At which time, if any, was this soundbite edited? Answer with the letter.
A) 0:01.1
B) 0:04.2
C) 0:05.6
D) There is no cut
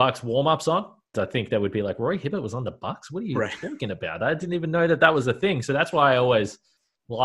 A